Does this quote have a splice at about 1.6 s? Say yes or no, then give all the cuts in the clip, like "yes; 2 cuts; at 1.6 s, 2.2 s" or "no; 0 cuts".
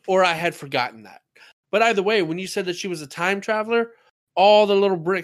no; 0 cuts